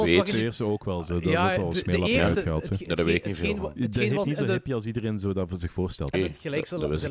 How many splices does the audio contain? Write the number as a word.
two